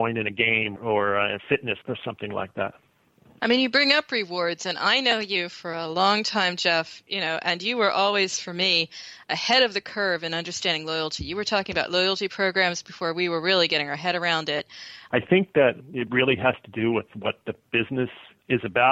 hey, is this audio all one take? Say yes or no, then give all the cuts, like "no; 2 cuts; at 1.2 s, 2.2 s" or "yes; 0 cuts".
no; 1 cut; at 15.1 s